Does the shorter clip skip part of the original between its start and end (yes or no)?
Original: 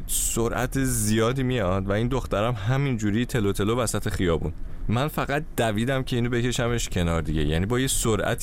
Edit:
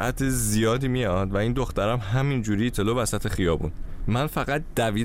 yes